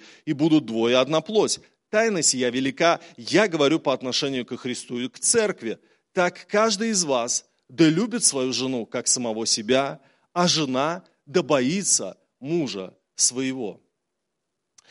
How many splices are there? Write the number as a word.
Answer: zero